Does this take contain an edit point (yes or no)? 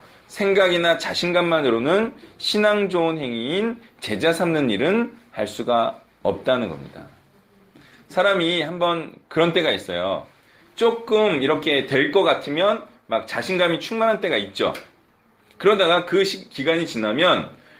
no